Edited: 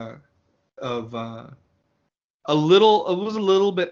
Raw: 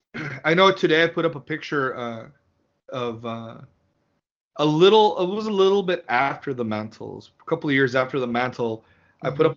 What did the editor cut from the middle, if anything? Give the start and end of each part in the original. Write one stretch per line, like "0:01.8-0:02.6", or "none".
none

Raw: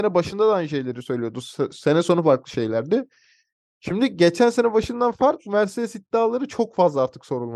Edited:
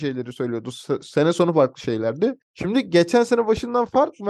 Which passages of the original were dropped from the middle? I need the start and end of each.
0:03.1-0:03.7

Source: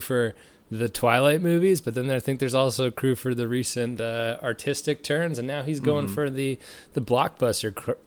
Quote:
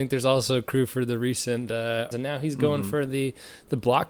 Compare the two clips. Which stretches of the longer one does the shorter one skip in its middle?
0:04.4-0:05.4

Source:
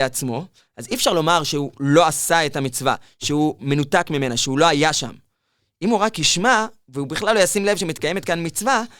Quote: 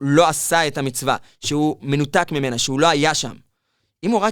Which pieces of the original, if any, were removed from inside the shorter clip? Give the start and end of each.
none

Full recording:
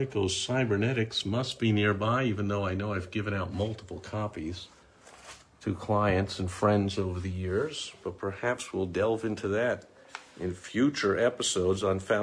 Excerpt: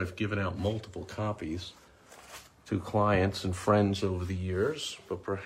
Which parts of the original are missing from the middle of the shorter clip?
none

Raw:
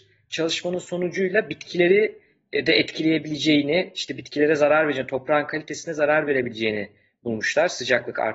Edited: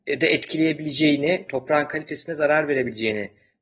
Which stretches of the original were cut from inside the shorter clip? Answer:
0:03.9-0:05.1

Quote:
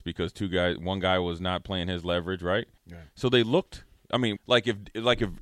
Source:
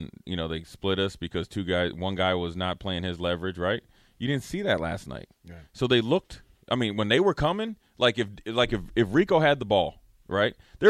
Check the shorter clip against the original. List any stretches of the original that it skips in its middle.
0:03.9-0:05.4
0:06.9-0:07.9

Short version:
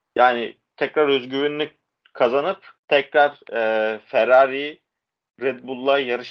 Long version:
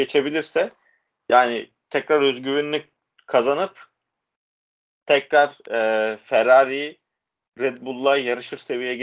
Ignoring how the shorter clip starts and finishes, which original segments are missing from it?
0:03.9-0:05.0

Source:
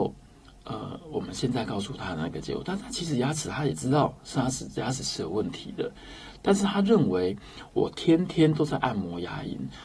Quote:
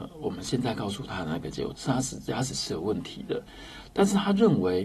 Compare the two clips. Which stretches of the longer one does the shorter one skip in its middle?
0:02.7-0:04.2

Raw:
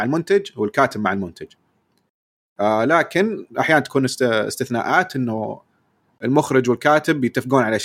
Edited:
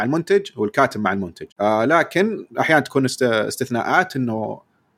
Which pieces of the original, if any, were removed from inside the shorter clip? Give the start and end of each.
0:01.5-0:02.5

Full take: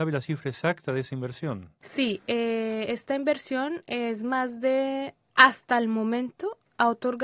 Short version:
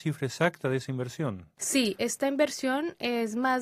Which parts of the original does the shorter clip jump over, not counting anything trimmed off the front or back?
0:02.2-0:02.9

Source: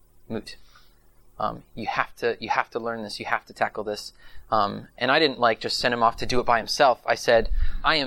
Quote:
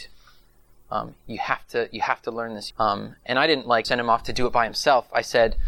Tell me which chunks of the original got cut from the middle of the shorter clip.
0:03.2-0:04.4
0:05.6-0:05.8

